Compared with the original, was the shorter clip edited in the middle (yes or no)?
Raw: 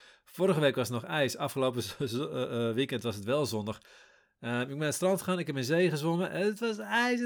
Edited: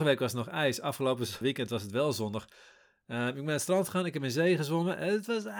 yes